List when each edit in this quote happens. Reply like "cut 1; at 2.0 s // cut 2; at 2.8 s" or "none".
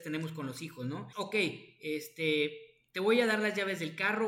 cut 1; at 1.1 s